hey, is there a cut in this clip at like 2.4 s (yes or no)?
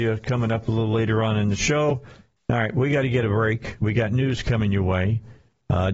yes